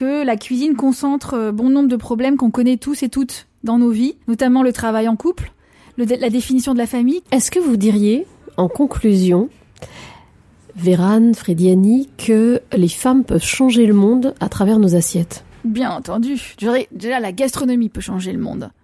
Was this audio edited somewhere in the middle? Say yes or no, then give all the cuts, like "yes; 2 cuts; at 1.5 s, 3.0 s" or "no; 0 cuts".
yes; 2 cuts; at 4.2 s, 7.2 s